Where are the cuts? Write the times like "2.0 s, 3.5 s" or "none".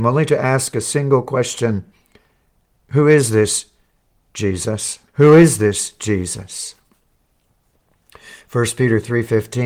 5.1 s